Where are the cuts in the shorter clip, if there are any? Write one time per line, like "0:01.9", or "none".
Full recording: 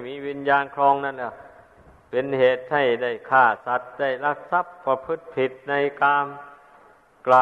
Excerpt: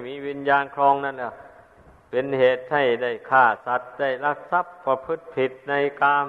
none